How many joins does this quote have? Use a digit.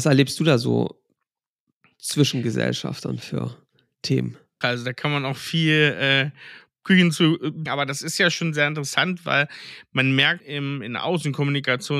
3